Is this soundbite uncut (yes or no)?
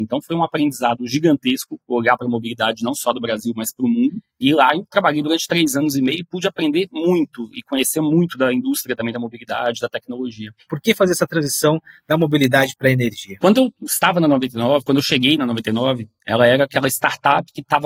no